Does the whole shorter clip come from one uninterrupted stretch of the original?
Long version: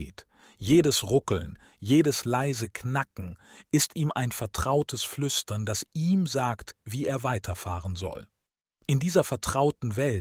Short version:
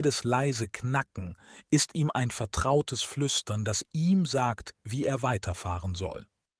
yes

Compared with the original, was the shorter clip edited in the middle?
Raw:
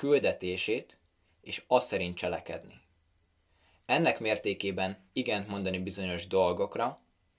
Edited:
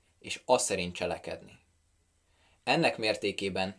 no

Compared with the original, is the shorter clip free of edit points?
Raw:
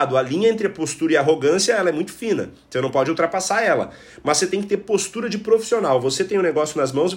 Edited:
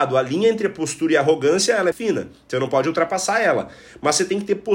no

